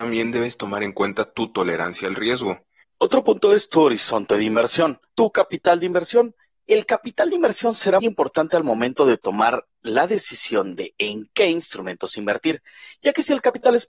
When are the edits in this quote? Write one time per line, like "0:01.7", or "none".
0:02.8
0:05.1
0:08.0

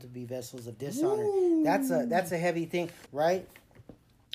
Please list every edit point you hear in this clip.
0:03.1

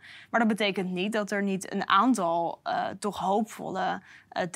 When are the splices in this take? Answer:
none

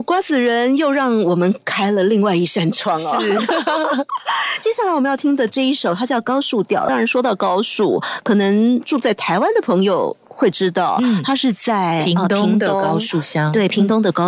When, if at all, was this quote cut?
none

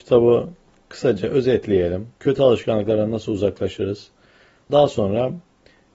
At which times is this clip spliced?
0:02.2
0:04.7

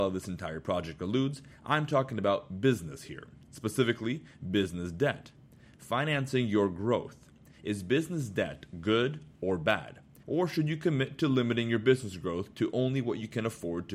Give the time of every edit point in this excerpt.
0:10.2

